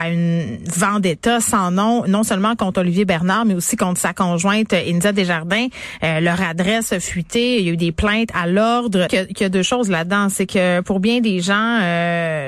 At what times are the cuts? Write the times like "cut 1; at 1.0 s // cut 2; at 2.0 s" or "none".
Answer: cut 1; at 9.1 s